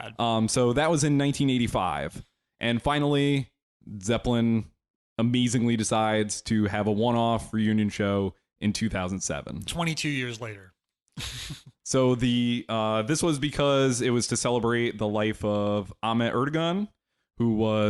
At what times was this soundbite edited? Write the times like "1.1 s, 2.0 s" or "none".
none